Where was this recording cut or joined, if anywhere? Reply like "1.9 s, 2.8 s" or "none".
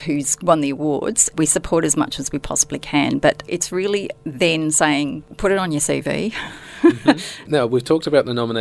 7.5 s